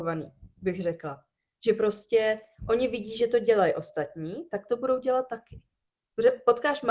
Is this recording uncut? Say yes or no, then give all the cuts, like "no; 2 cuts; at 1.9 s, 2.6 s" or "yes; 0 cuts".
yes; 0 cuts